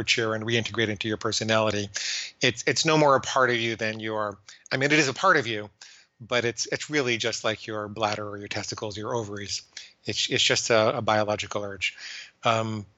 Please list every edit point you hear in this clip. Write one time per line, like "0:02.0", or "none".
none